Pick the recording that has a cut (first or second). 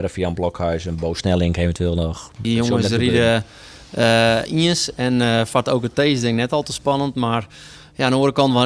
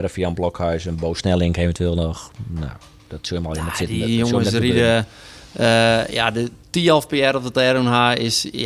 first